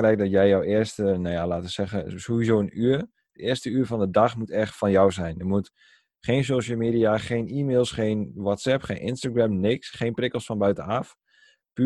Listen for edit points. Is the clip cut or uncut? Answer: uncut